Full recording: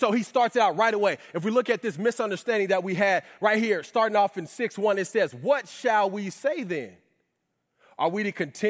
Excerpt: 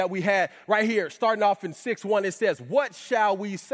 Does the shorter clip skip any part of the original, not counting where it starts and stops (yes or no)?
no